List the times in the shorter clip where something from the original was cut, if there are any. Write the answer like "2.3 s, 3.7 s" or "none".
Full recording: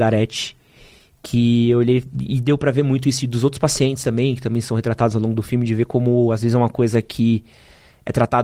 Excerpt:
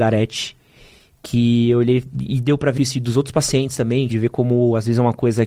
2.8 s, 4.1 s